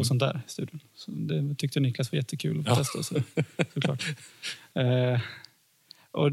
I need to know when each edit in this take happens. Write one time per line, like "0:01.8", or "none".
none